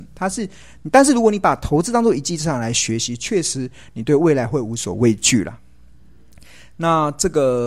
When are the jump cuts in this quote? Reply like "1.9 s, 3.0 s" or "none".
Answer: none